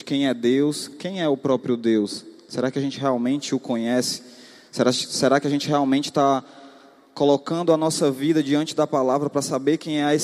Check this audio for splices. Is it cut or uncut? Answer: uncut